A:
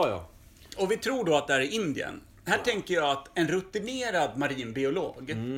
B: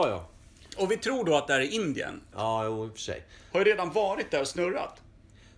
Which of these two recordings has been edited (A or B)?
B